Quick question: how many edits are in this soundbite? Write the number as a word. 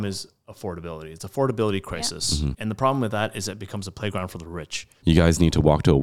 two